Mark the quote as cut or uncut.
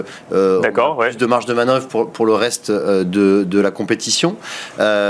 uncut